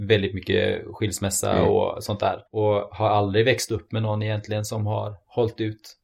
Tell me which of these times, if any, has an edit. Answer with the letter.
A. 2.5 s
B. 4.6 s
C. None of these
A